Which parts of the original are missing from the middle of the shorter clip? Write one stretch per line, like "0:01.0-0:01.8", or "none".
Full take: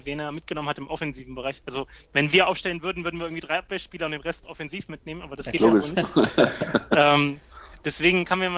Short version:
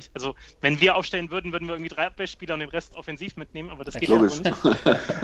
none